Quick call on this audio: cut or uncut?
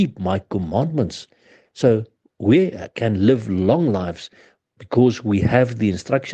cut